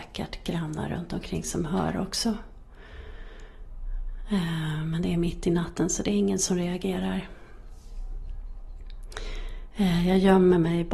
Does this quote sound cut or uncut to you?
uncut